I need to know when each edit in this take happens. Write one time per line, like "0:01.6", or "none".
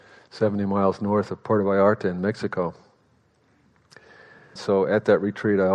0:04.6